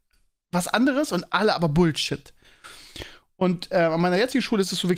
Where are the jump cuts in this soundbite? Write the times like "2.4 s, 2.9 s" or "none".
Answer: none